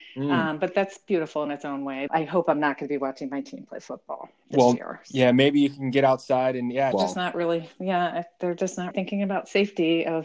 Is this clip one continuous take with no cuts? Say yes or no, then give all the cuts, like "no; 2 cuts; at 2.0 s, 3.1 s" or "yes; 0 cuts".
no; 3 cuts; at 2.1 s, 6.9 s, 8.9 s